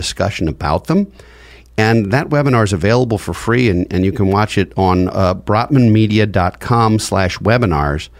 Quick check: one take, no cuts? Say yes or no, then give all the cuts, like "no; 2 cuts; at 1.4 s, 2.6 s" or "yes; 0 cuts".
yes; 0 cuts